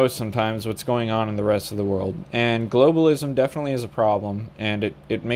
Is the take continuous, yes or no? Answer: yes